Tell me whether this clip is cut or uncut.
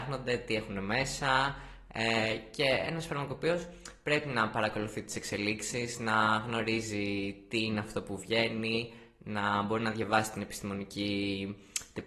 uncut